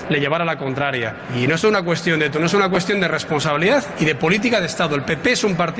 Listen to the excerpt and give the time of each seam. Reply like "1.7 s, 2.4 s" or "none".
none